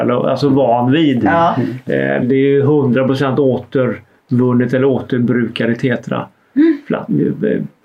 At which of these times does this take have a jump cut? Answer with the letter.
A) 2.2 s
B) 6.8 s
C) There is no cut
A